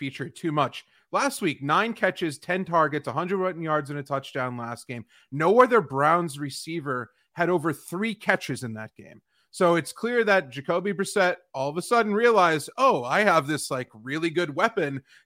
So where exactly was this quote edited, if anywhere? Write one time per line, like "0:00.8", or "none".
none